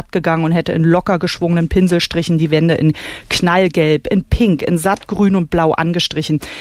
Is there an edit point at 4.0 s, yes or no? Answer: no